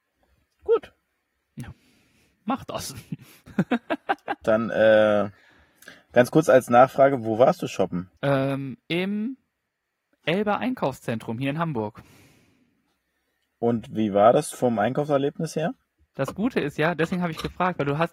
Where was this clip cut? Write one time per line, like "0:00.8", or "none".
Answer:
0:08.2
0:14.5
0:16.2